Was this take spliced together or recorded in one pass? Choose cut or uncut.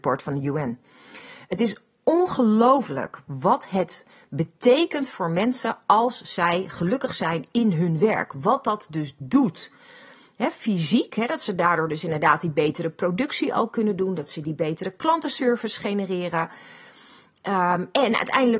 uncut